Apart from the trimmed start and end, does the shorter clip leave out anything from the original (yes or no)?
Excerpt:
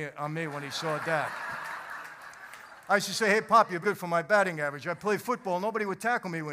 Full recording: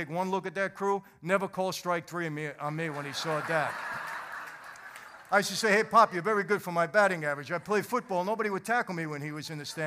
yes